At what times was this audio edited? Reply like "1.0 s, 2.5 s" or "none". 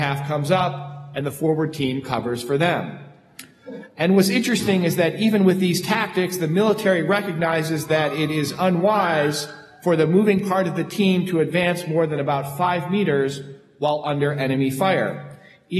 none